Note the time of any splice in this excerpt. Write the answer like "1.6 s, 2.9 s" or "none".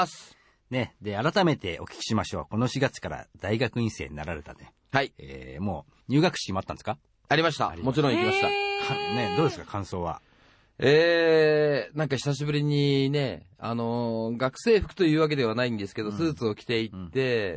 none